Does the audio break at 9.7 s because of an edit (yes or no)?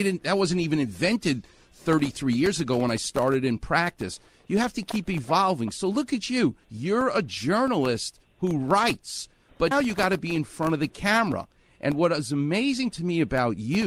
yes